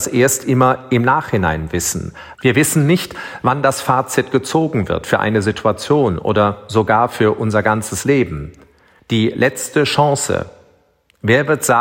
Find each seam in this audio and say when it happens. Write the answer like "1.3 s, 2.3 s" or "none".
2.4 s, 9.0 s